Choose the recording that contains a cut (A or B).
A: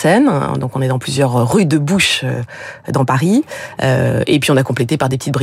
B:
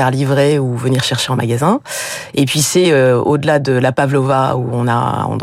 A